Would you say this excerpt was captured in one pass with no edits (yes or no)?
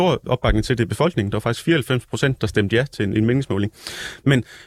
yes